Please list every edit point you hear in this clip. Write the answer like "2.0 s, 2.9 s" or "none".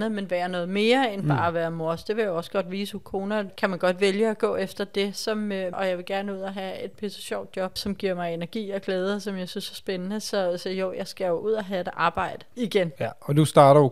3.5 s, 5.7 s